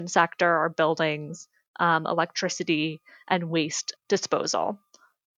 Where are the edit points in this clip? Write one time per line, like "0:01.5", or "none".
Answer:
0:04.0